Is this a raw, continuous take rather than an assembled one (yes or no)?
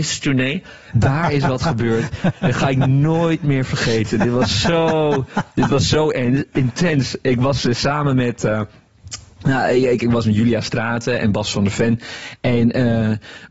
no